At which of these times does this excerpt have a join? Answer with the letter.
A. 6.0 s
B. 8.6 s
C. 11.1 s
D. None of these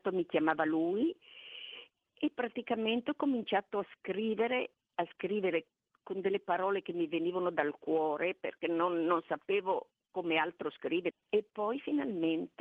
C